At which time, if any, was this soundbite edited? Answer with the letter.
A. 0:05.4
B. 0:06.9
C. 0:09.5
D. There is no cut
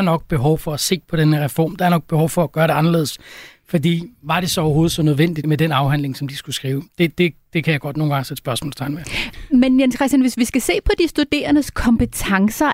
A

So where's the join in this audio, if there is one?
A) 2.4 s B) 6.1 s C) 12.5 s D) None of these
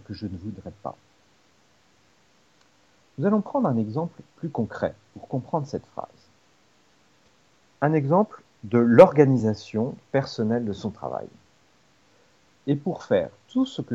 C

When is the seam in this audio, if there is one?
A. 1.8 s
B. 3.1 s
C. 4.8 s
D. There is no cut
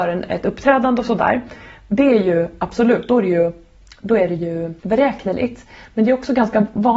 C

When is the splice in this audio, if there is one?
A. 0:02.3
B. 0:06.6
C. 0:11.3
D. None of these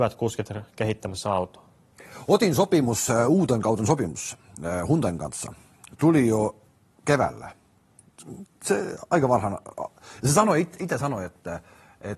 D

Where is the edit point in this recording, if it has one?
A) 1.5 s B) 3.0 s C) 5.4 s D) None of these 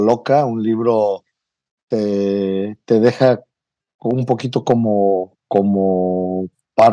D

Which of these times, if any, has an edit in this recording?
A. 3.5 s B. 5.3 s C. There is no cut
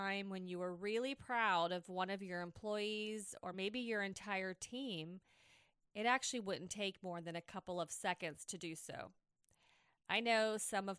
C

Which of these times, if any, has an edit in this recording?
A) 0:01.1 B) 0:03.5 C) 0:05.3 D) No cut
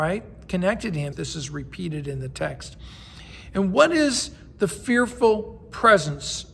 A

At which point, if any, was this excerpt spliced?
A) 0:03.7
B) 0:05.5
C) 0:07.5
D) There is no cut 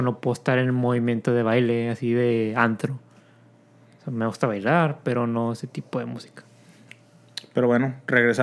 D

